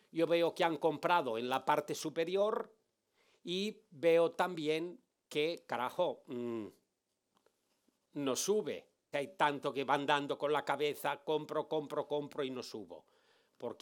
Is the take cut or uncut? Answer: cut